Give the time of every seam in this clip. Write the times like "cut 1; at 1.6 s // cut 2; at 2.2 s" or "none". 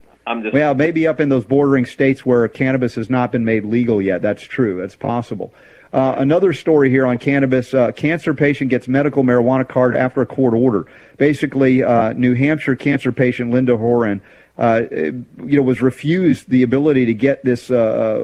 none